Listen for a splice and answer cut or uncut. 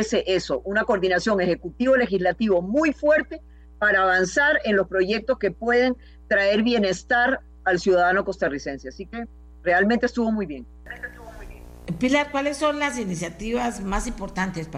uncut